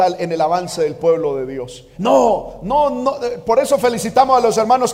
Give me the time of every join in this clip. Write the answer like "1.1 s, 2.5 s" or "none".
1.9 s